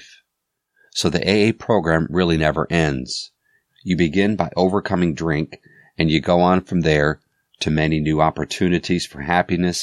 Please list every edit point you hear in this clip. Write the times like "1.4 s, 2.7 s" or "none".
none